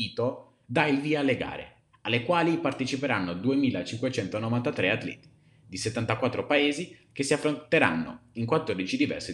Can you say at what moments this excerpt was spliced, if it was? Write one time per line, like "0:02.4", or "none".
none